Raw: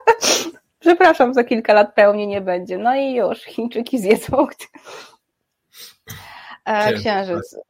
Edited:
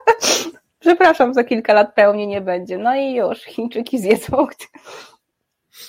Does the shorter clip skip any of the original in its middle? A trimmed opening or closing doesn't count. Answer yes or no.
no